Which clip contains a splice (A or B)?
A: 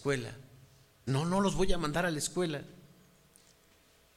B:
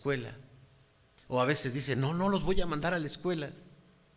A